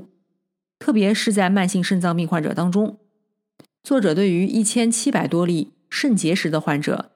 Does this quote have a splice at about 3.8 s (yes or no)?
yes